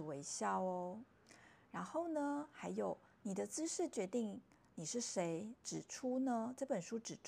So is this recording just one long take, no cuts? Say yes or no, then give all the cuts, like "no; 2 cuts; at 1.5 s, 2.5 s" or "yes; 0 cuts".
yes; 0 cuts